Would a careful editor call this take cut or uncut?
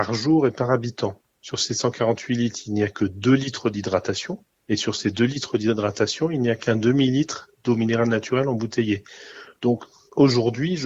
uncut